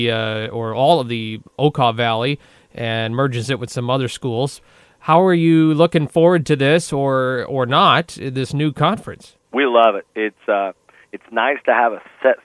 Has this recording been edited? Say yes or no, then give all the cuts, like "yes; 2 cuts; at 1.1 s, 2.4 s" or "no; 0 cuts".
yes; 1 cut; at 9.4 s